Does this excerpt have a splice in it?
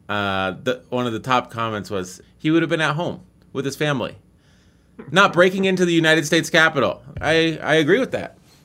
yes; 2 cuts; at 2.2 s, 7.1 s

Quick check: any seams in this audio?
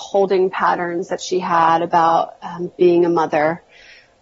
no; 0 cuts

